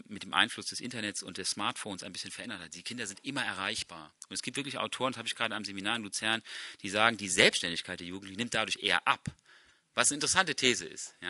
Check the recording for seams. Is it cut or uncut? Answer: uncut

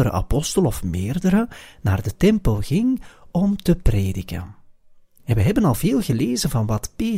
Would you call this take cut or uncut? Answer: uncut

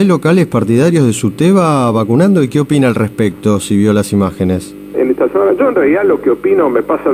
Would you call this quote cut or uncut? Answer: cut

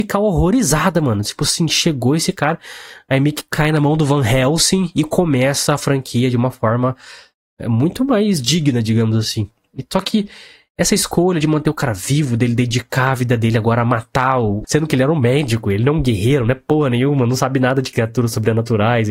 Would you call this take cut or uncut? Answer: cut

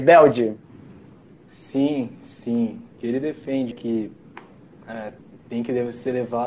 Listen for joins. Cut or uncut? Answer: cut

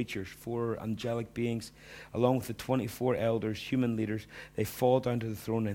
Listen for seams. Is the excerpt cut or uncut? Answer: uncut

